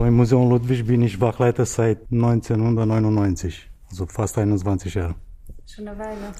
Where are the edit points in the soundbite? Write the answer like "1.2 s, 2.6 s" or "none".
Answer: 2.1 s